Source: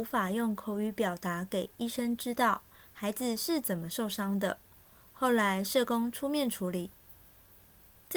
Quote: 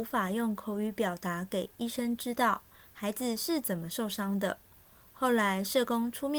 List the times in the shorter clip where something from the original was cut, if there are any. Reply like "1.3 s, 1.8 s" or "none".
none